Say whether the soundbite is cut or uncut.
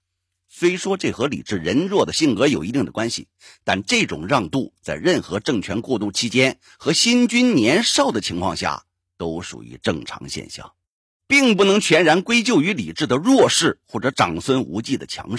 uncut